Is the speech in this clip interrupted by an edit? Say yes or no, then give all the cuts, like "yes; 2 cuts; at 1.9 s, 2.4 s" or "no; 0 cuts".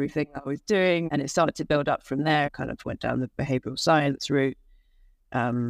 yes; 2 cuts; at 1.1 s, 2.4 s